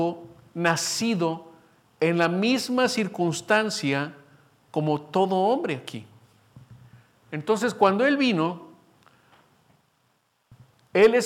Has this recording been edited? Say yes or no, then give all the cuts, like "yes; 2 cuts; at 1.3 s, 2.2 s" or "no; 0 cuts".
no; 0 cuts